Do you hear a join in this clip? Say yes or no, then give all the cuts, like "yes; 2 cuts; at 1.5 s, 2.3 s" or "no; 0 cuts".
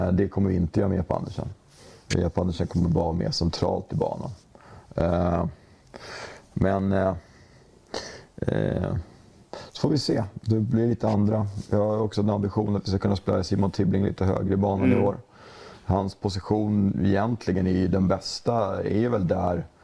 no; 0 cuts